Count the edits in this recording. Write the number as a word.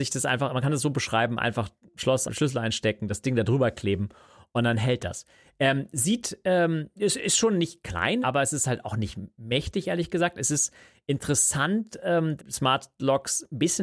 three